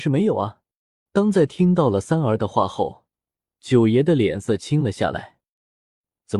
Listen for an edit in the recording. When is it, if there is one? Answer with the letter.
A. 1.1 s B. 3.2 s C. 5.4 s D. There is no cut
A